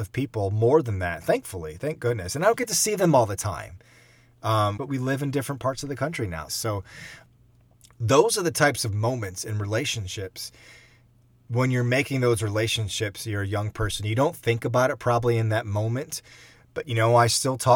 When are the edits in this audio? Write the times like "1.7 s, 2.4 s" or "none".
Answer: 4.8 s, 6.5 s